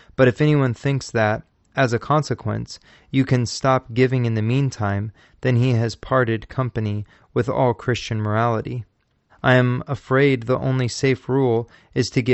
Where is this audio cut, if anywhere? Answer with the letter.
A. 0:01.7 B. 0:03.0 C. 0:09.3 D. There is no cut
C